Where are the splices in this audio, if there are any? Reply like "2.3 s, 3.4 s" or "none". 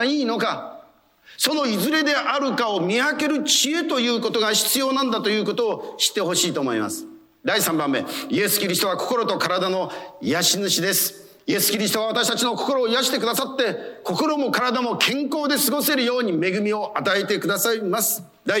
none